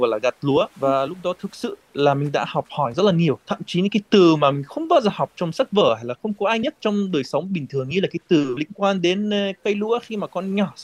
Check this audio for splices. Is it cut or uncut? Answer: uncut